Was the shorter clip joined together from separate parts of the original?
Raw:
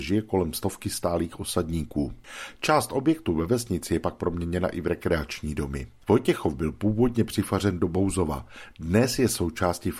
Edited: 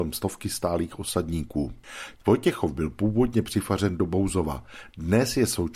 yes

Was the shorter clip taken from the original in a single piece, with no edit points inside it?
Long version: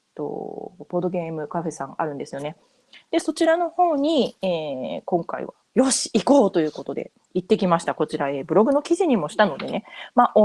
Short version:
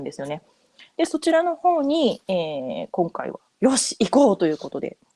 yes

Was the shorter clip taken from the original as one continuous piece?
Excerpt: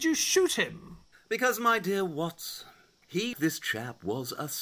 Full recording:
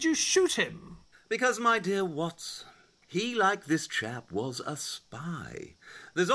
no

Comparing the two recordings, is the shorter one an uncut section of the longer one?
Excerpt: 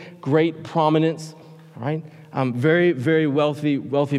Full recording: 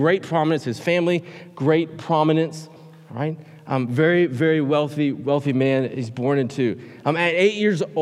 yes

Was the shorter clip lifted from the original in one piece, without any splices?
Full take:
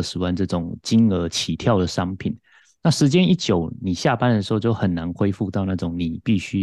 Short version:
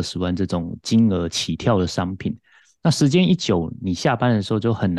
yes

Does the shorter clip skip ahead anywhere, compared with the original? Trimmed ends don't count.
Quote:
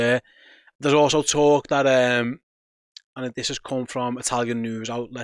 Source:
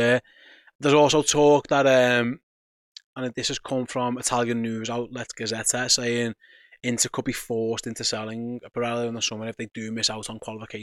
no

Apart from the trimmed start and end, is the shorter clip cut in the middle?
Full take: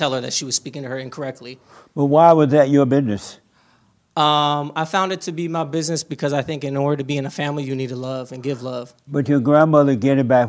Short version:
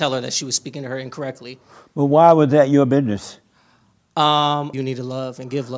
yes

